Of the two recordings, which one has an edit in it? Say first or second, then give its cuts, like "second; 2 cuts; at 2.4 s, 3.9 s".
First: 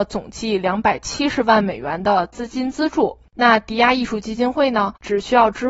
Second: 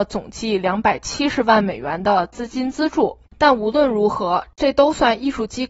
second; 1 cut; at 3.3 s